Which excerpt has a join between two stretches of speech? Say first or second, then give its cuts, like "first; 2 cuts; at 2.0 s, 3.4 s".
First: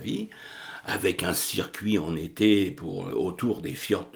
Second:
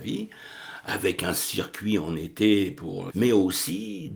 second; 1 cut; at 3.1 s